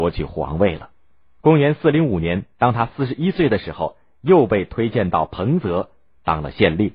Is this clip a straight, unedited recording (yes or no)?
no